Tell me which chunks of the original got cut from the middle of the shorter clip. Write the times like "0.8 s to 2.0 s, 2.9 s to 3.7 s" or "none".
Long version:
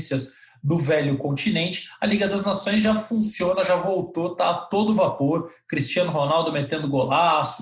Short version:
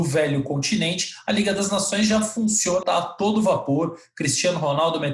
3.6 s to 4.3 s

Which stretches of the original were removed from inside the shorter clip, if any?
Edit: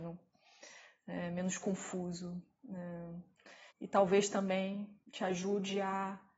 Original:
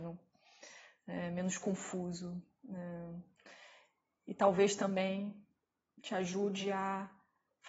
3.7 s to 4.2 s, 5.5 s to 5.9 s

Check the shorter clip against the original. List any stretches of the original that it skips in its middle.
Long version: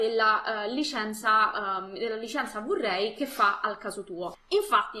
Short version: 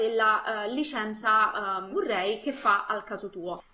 1.9 s to 2.6 s

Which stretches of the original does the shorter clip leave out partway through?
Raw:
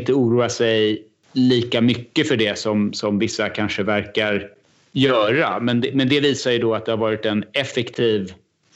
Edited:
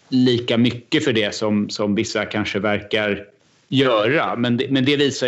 none

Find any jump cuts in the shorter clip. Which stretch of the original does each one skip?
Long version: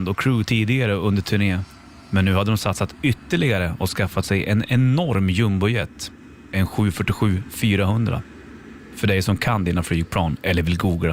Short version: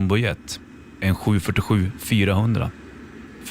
none

